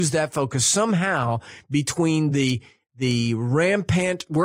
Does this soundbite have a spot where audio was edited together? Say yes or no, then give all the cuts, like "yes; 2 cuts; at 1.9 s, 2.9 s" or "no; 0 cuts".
no; 0 cuts